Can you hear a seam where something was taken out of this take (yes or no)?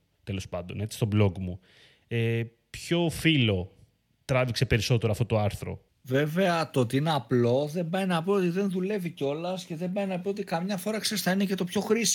no